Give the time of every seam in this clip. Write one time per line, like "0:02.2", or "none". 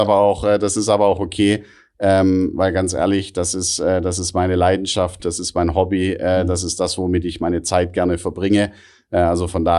0:05.2